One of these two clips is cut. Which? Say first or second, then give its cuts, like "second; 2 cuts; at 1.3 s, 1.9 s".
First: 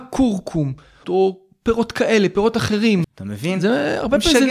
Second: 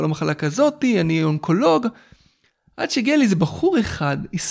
first; 2 cuts; at 1.0 s, 3.0 s